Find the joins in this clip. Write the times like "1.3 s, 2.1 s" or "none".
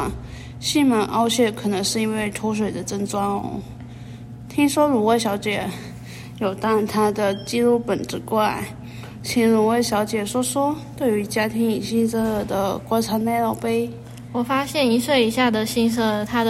none